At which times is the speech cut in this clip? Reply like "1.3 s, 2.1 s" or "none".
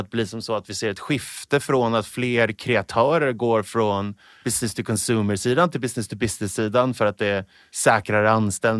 none

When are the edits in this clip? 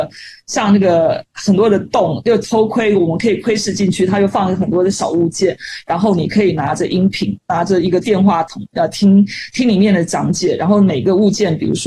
none

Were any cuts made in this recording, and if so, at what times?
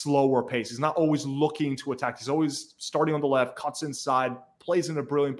none

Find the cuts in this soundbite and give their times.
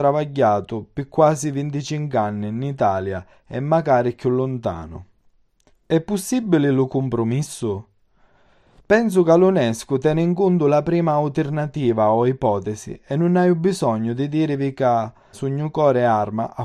5.7 s, 15.3 s

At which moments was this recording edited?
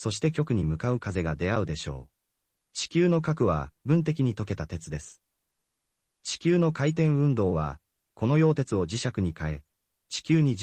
2.5 s

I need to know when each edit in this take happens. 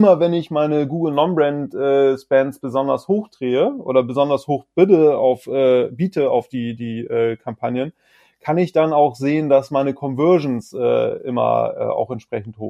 none

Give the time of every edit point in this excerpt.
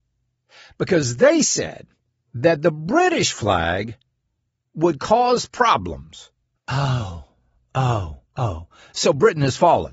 6.6 s, 8.3 s

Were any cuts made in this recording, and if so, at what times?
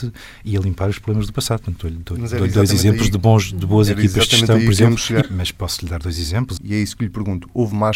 5.2 s, 6.6 s

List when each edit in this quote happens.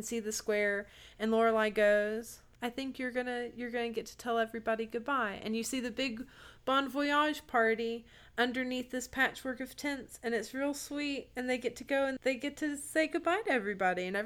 2.6 s, 12.2 s

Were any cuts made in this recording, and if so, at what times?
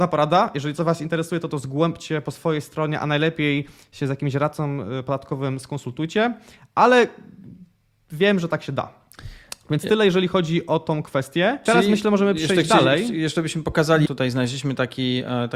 11.7 s, 14.1 s

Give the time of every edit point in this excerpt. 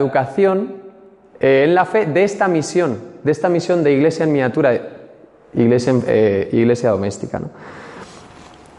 none

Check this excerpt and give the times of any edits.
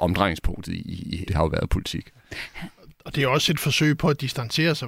1.3 s

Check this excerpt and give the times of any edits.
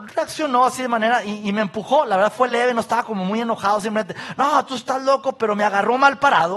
none

